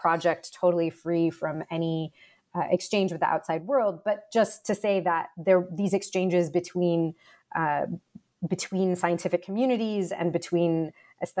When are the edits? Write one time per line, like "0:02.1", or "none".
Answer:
none